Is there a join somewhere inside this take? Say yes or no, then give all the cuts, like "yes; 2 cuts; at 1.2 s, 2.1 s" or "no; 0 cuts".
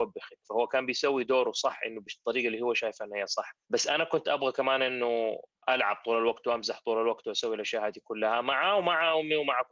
yes; 1 cut; at 3.6 s